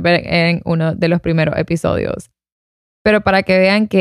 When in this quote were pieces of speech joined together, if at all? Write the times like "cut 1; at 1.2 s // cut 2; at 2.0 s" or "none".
none